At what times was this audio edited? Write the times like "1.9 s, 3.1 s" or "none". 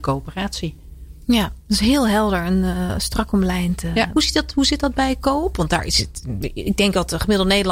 4.1 s